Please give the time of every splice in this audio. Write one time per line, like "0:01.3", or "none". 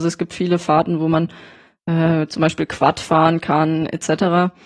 none